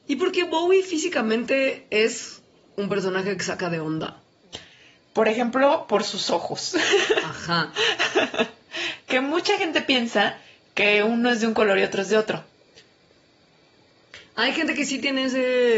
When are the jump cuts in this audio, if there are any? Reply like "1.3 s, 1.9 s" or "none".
none